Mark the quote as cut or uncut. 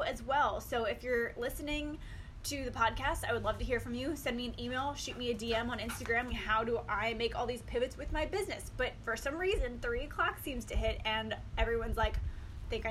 cut